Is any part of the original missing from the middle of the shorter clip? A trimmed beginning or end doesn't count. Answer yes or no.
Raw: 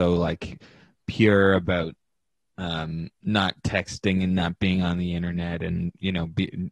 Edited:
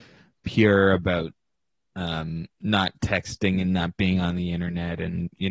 no